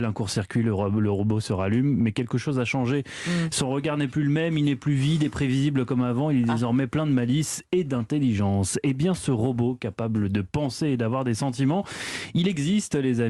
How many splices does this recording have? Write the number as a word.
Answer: zero